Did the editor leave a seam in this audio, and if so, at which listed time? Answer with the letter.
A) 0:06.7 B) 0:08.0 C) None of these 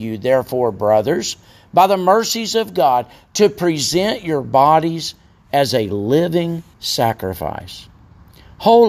A